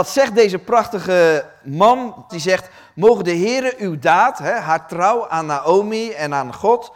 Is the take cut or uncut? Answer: cut